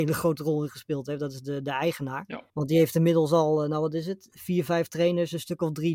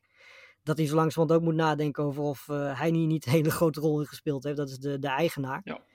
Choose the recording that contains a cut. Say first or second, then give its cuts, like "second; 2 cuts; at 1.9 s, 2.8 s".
first; 1 cut; at 2.5 s